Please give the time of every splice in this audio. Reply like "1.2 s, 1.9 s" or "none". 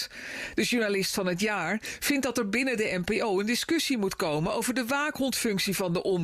none

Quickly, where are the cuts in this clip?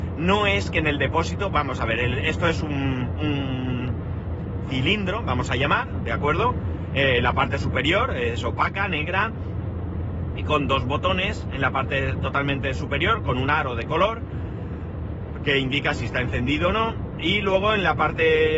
none

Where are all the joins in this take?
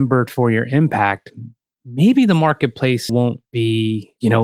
3.1 s

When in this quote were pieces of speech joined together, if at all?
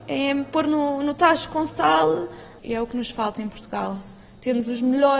2.6 s

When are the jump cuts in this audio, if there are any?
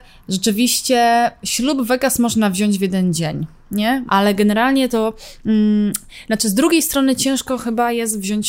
4.1 s

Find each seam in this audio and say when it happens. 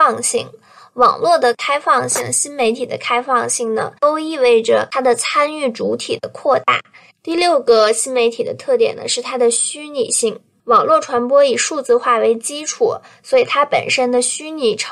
4.0 s, 7.1 s

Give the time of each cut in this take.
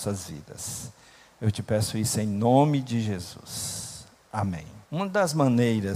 4.8 s

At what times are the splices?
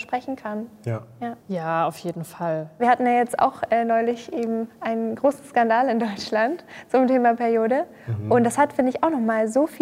1.4 s, 2.8 s

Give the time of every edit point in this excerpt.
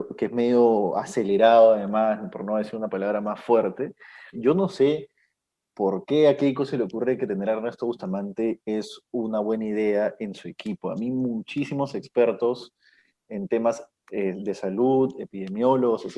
4.3 s

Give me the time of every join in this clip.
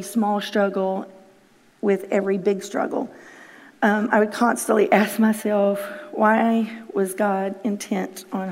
none

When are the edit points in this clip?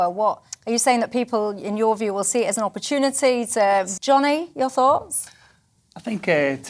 4.0 s

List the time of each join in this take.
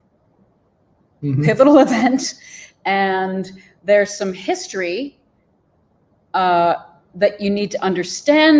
none

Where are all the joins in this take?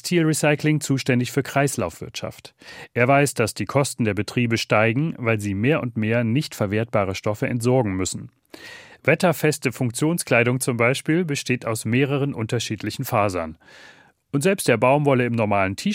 none

